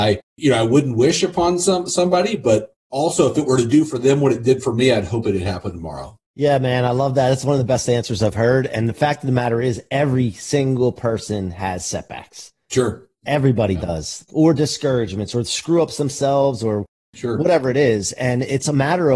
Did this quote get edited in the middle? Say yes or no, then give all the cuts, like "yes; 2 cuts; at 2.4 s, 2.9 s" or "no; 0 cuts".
no; 0 cuts